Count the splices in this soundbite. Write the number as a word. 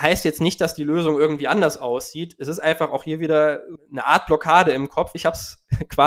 two